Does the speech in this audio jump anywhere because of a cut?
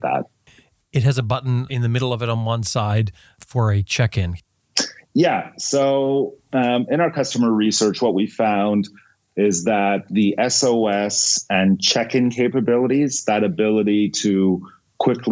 yes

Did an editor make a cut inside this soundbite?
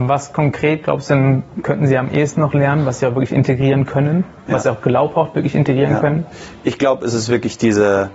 no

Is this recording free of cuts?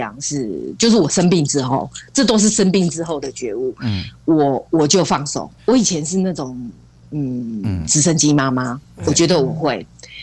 no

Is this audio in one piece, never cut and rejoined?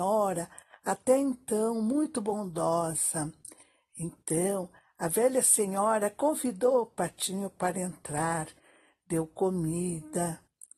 yes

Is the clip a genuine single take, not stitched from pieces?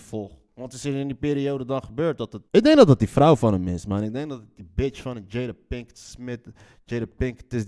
no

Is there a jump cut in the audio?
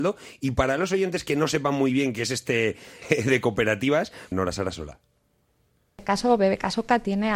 yes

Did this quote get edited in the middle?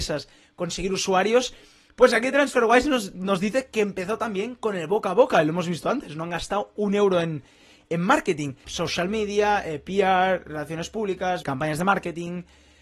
yes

